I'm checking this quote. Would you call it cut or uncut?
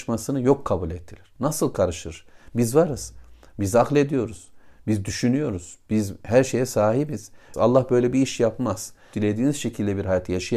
cut